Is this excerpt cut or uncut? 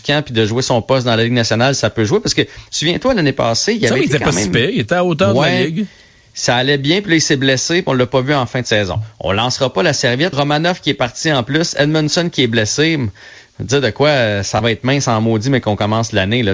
cut